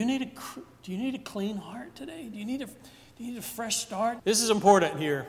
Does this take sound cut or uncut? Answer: cut